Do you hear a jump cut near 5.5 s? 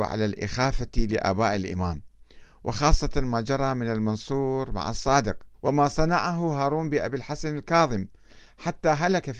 yes; 1 cut; at 5.5 s

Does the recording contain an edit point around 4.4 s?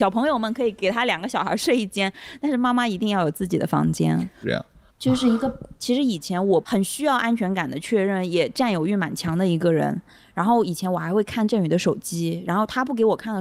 yes; 2 cuts; at 4.4 s, 5.8 s

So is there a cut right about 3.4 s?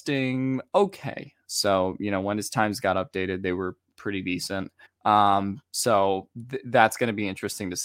no; 2 cuts; at 1.4 s, 4.9 s

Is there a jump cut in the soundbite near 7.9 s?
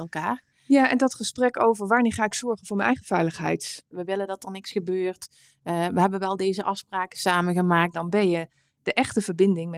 yes; 2 cuts; at 3.9 s, 7.9 s

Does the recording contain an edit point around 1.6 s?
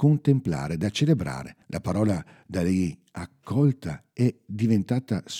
yes; 1 cut; at 1.6 s

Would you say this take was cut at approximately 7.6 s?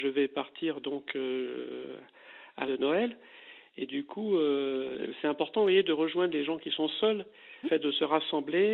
yes; 2 cuts; at 2.6 s, 7.6 s

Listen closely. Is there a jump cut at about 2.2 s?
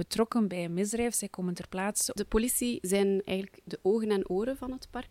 yes; 1 cut; at 2.2 s

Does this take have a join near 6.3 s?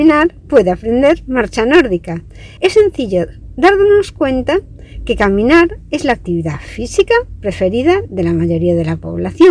no; 1 cut; at 2.6 s

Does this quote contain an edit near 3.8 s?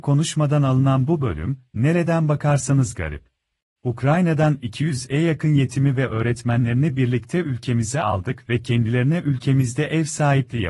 yes; 1 cut; at 3.8 s

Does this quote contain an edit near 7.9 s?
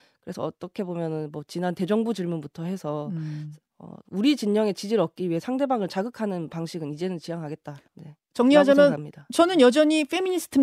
yes; 1 cut; at 7.9 s

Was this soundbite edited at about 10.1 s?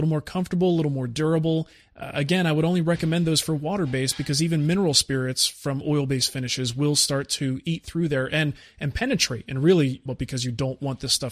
yes; 1 cut; at 10.1 s

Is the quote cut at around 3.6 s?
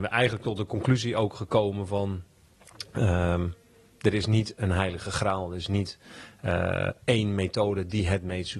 no; 0 cuts

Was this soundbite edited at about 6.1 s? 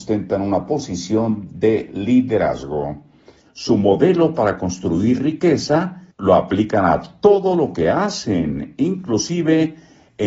yes; 2 cuts; at 3.4 s, 6.1 s

